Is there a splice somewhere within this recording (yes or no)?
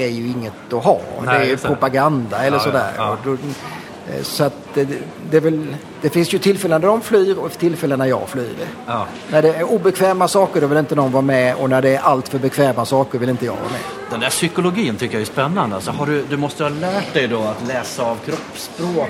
no